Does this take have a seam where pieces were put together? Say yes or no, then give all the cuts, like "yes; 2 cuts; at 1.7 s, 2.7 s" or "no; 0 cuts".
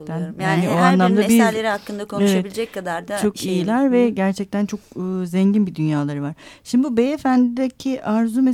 no; 0 cuts